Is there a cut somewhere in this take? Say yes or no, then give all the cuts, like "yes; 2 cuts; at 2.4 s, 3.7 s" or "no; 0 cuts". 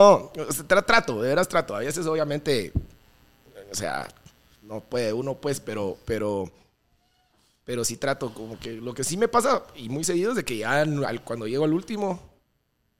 no; 0 cuts